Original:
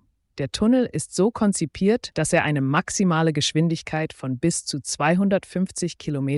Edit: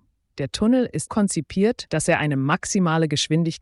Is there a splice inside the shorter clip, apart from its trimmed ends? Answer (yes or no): yes